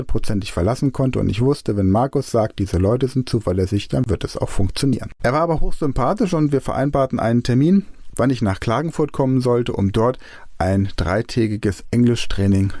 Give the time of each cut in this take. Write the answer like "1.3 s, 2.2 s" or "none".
5.2 s